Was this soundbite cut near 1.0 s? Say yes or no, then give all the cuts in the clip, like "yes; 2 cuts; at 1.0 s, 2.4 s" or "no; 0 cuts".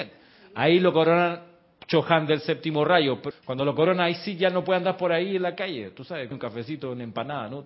no; 2 cuts; at 3.3 s, 6.3 s